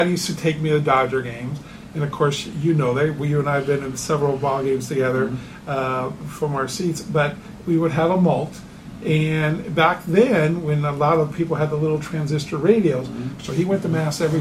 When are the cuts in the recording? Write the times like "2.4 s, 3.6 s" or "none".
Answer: 13.4 s